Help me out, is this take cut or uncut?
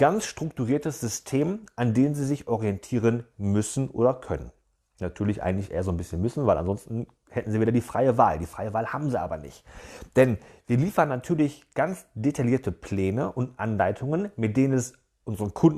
uncut